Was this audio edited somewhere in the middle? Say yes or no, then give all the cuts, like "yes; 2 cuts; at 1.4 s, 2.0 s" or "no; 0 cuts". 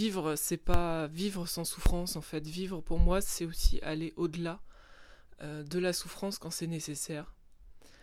no; 0 cuts